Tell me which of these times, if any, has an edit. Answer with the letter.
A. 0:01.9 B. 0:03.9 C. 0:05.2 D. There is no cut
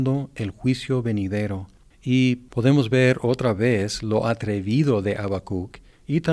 A